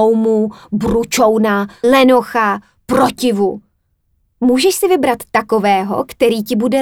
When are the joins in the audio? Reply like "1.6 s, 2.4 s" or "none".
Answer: 1.8 s